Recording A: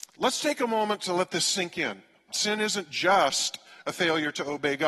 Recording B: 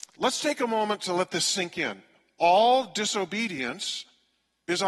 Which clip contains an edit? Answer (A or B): A